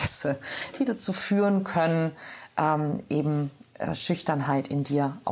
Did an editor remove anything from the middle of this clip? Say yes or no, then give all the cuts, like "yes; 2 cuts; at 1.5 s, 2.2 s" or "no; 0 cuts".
no; 0 cuts